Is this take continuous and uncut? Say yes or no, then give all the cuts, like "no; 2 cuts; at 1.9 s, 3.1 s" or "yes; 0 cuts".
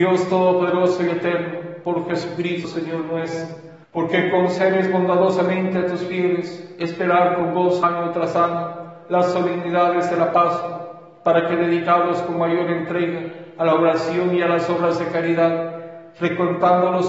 no; 2 cuts; at 3.8 s, 9.0 s